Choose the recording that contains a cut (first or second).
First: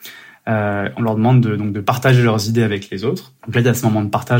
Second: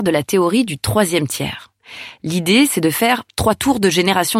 first